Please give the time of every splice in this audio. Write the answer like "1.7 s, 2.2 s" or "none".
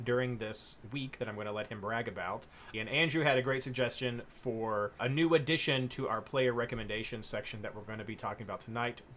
2.7 s, 5.0 s